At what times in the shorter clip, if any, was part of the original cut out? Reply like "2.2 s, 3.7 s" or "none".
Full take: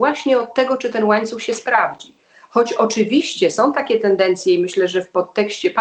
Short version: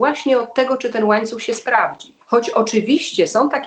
2.2 s